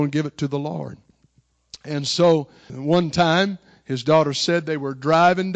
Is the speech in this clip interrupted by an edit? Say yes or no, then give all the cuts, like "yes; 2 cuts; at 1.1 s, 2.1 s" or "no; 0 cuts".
yes; 1 cut; at 2.7 s